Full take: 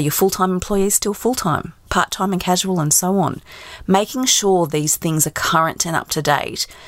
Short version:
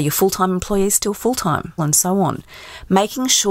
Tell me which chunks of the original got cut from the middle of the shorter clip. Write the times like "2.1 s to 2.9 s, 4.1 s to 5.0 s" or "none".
1.8 s to 2.8 s